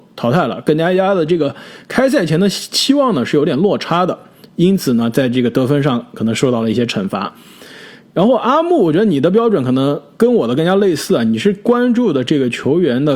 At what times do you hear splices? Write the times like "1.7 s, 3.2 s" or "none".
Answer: none